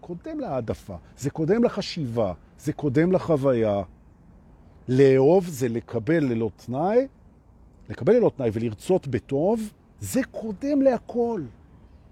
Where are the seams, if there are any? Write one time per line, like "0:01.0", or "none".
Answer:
none